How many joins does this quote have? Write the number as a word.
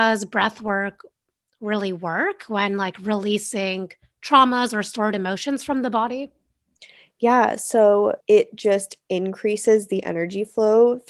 one